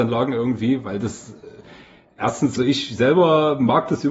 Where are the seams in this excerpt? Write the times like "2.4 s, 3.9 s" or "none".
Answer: 2.6 s